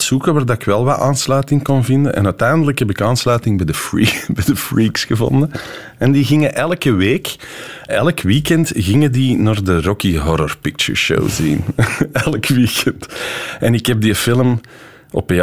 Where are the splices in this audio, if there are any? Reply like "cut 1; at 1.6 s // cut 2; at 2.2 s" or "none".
cut 1; at 7.9 s

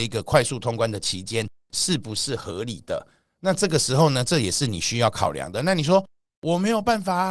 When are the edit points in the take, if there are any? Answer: none

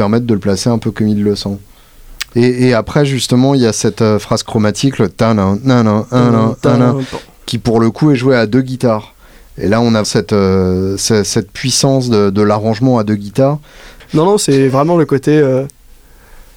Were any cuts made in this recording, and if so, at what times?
cut 1; at 2.3 s // cut 2; at 10.0 s // cut 3; at 14.0 s

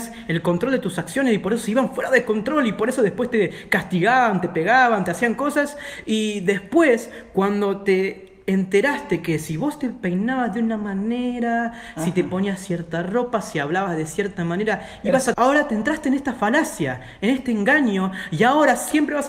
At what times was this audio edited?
cut 1; at 15.3 s

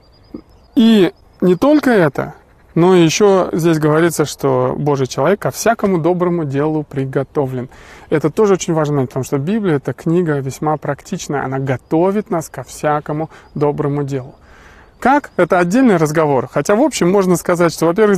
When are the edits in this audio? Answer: none

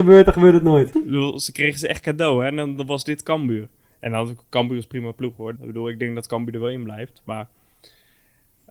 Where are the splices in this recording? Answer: cut 1; at 0.9 s // cut 2; at 5.6 s

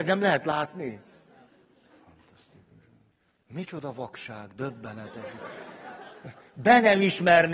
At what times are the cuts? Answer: none

